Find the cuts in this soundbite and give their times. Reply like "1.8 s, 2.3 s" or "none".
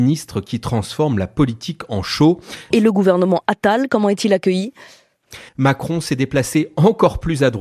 2.7 s, 5.5 s

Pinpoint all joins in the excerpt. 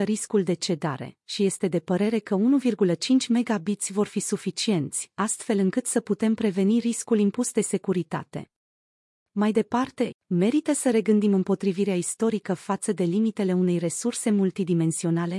10.1 s

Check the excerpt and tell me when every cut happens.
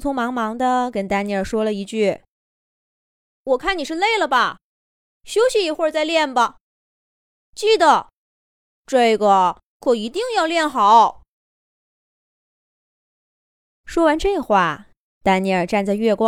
15.0 s

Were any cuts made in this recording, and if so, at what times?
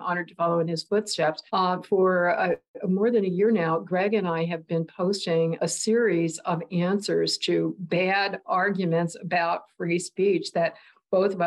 1.5 s

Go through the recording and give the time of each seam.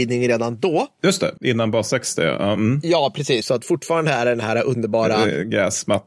1.4 s, 3.4 s

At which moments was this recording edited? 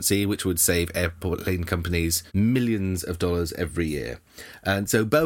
2.3 s

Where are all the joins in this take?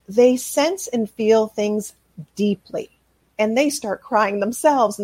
3.3 s

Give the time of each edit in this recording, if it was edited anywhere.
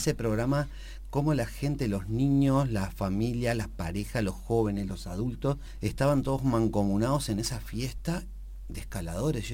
none

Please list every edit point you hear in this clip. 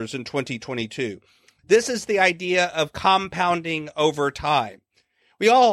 none

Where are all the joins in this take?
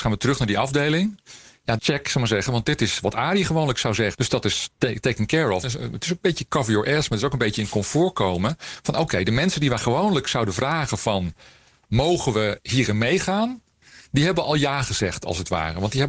1.8 s, 4.1 s, 5.6 s

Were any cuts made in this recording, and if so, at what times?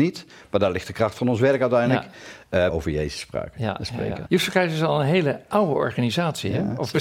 2.7 s, 4.3 s

